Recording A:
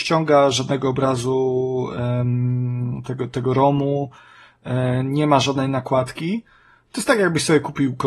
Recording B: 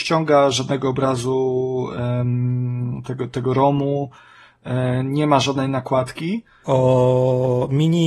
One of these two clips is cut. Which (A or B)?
B